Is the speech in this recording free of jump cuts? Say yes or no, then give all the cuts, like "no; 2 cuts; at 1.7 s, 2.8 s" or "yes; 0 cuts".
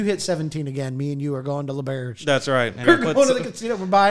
no; 1 cut; at 2.8 s